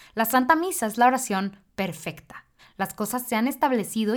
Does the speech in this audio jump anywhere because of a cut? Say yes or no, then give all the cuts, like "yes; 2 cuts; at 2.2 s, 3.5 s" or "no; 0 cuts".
yes; 1 cut; at 2.6 s